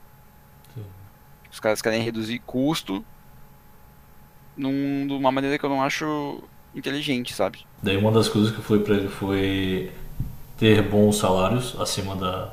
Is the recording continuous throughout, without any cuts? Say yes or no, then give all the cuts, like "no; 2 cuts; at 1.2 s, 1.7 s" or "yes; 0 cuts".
no; 1 cut; at 7.8 s